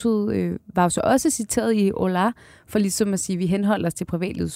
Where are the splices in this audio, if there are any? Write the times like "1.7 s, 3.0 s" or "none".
none